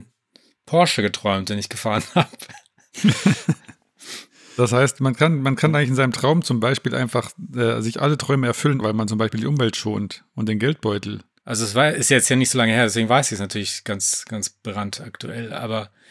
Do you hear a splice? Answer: yes; 2 cuts; at 8.8 s, 11.4 s

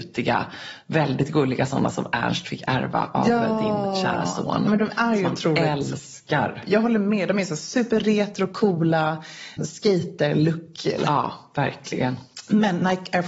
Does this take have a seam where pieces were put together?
yes; 2 cuts; at 9.6 s, 11.0 s

